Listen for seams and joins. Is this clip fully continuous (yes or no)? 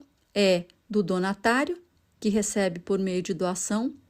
yes